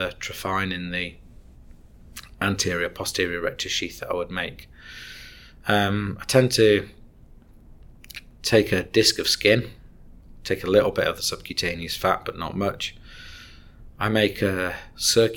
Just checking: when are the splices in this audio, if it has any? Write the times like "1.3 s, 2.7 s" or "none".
none

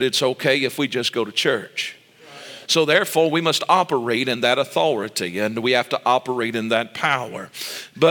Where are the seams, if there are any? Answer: 2.7 s

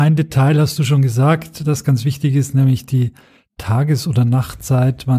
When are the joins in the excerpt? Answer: none

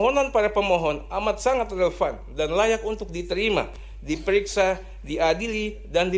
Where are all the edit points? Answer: none

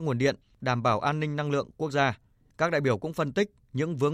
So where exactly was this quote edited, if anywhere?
2.4 s

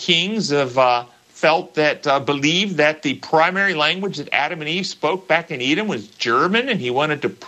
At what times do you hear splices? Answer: 1.2 s

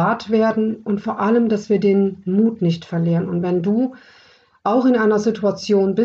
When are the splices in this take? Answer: none

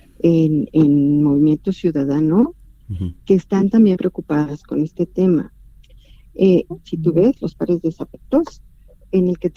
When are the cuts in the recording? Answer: 3.9 s, 6.7 s

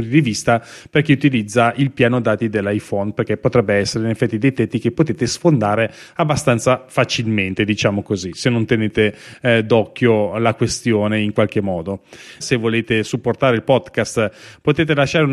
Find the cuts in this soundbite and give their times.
12.4 s

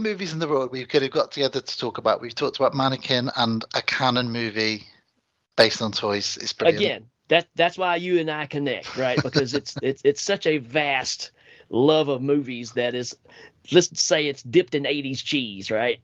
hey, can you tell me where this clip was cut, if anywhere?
13.9 s

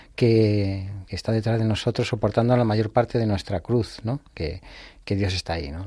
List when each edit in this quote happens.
1.1 s, 4.3 s

